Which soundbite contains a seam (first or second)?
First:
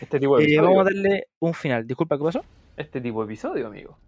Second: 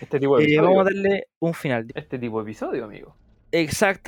second